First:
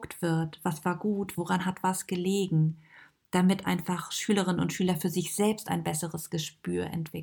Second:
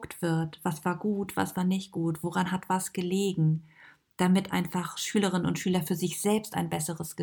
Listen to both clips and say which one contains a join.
first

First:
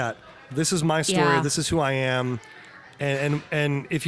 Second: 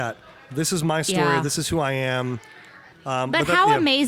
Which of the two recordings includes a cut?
second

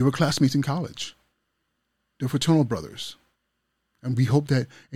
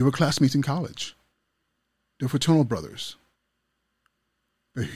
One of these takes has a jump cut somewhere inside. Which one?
first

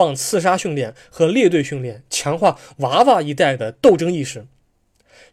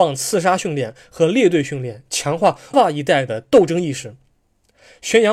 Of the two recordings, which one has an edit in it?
second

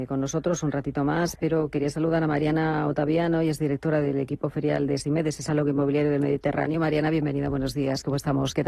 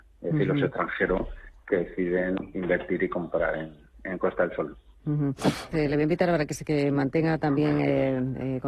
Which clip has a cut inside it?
second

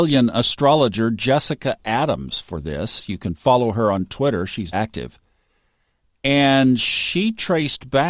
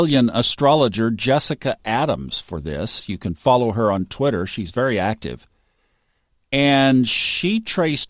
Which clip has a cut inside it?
first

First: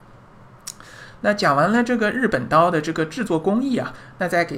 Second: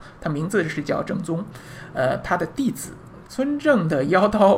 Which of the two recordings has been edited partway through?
second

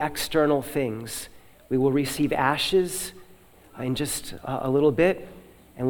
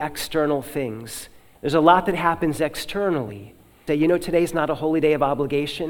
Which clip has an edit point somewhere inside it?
second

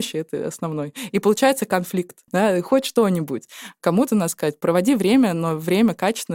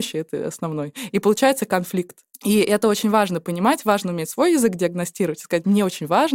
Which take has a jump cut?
first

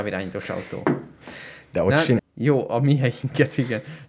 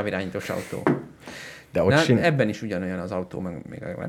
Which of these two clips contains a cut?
first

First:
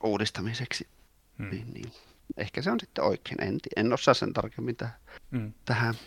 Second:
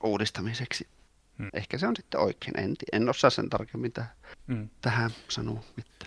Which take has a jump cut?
second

